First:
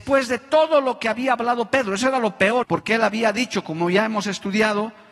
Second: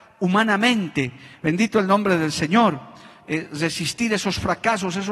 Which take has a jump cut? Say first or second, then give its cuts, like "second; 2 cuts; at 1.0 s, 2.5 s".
first; 1 cut; at 2.6 s